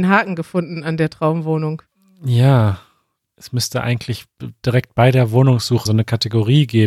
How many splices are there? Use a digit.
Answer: 1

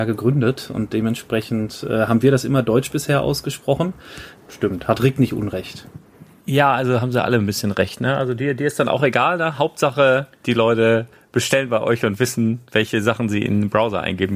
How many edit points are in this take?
1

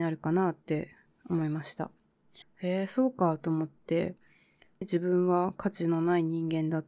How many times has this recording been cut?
2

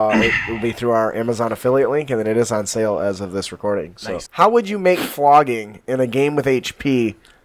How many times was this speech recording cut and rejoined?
1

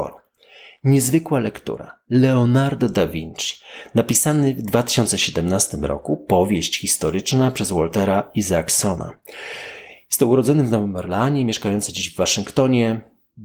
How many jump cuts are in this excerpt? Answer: 0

